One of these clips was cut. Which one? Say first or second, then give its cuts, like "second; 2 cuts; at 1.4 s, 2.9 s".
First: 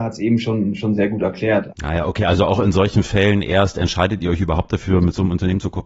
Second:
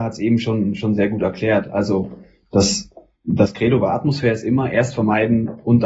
first; 1 cut; at 1.7 s